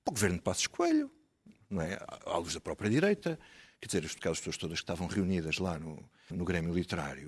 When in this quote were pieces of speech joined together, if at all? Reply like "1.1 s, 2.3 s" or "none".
6.3 s